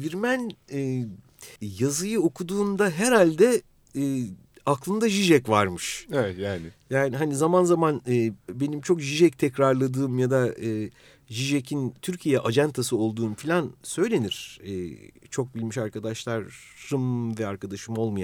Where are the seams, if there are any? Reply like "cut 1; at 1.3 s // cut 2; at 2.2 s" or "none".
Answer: cut 1; at 1.6 s